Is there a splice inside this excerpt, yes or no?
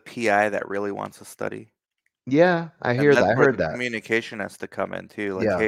no